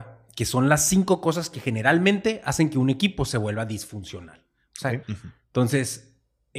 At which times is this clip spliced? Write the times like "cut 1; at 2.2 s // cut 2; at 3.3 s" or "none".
cut 1; at 5.0 s